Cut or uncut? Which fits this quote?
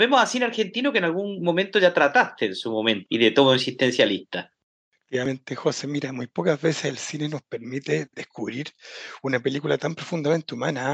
cut